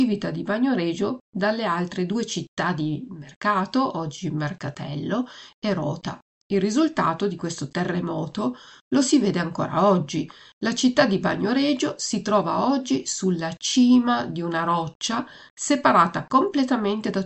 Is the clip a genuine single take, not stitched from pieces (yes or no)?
yes